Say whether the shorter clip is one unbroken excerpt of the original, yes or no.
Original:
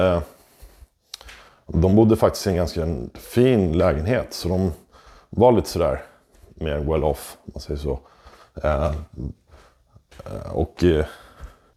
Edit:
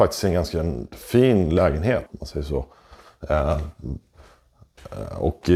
no